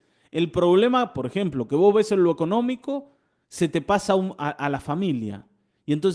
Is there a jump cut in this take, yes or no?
no